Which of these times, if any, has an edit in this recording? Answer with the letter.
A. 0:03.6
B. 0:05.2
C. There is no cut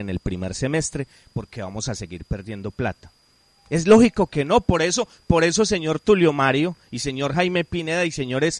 C